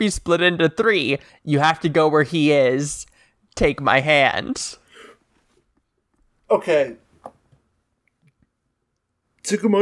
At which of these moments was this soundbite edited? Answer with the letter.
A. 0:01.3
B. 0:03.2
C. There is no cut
A